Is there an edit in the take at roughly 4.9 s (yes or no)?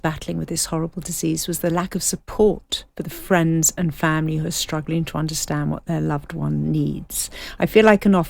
no